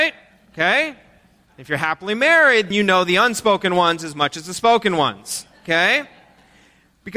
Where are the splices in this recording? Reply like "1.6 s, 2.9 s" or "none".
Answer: 2.7 s